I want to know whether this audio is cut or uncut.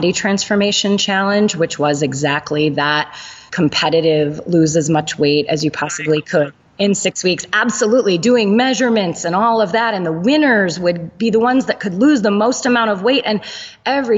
uncut